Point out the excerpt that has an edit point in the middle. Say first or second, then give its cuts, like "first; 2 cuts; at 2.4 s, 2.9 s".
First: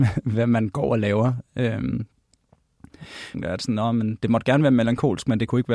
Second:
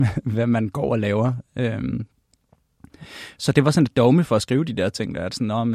first; 1 cut; at 3.3 s